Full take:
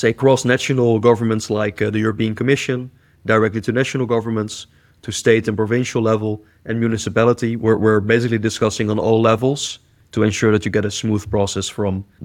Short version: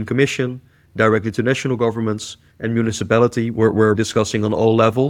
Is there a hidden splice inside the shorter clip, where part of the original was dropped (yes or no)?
yes